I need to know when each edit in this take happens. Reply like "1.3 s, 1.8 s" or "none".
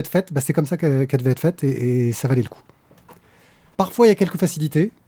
3.7 s

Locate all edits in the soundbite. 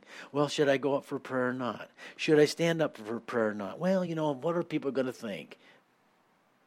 none

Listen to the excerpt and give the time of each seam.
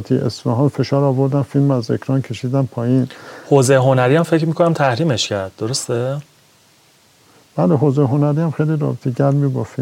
none

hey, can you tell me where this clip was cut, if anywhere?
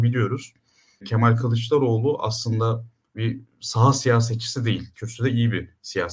4.9 s

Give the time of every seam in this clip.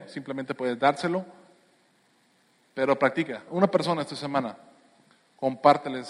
3.5 s

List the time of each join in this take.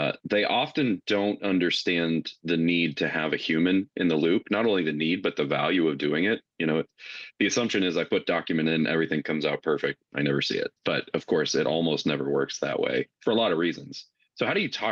10.8 s, 13.1 s

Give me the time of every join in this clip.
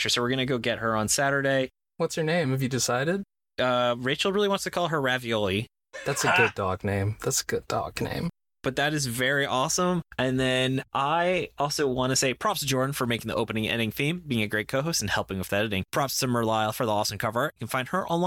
none

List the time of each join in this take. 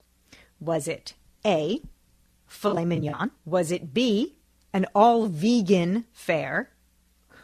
3.4 s

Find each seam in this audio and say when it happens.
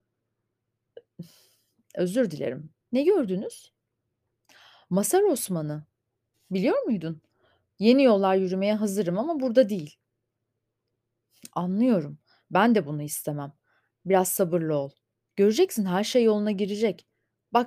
2.8 s, 7.7 s

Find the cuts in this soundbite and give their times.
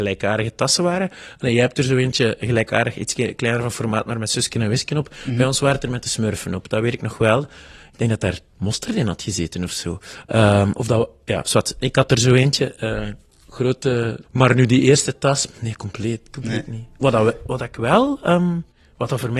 14.2 s

